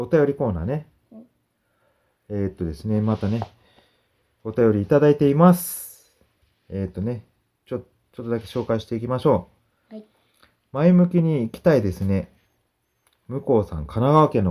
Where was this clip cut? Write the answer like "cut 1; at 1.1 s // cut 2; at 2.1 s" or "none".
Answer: none